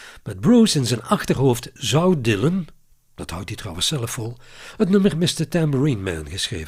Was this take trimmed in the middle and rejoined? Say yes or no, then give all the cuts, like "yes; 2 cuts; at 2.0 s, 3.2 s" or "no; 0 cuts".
no; 0 cuts